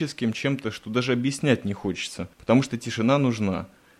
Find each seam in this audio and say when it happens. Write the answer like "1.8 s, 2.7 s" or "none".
2.3 s